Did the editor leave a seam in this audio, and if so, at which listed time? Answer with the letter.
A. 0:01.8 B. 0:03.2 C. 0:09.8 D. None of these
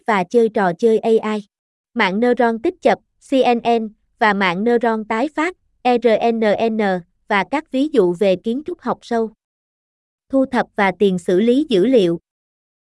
A